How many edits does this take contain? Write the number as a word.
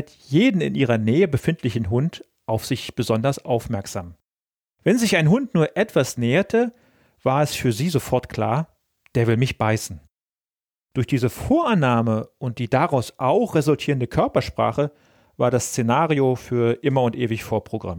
zero